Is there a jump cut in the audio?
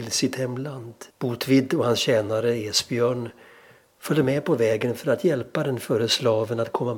yes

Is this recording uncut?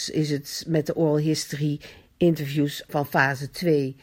no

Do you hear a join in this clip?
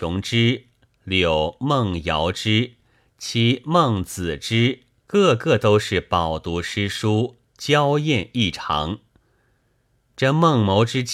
yes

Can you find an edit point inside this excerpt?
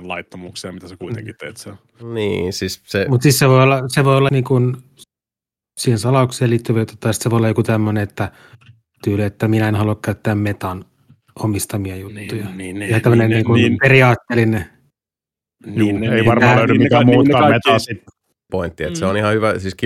yes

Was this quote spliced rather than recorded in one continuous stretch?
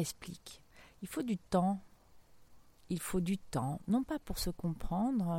no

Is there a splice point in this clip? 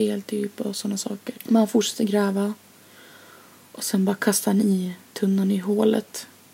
yes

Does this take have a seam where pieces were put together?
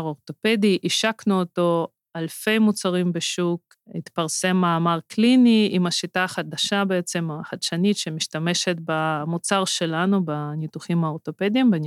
no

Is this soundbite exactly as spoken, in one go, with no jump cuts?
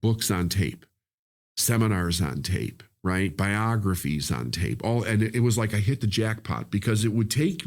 yes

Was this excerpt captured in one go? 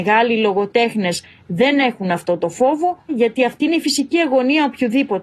no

